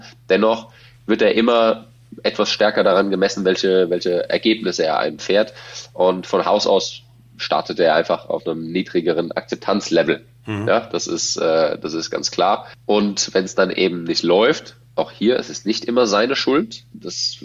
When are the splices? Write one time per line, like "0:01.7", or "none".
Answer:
none